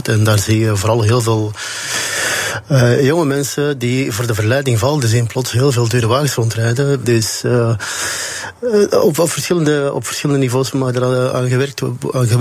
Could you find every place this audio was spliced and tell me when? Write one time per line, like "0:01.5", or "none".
0:07.0